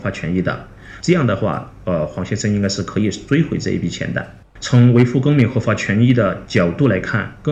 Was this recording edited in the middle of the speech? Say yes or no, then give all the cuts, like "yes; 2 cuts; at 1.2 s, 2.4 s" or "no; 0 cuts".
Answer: yes; 2 cuts; at 1.0 s, 4.6 s